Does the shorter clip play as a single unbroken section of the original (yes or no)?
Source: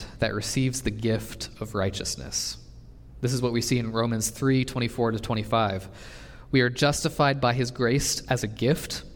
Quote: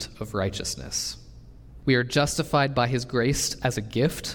no